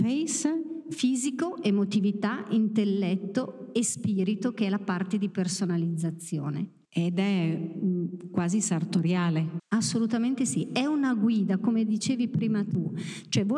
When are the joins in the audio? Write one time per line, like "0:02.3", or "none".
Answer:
0:06.8
0:09.6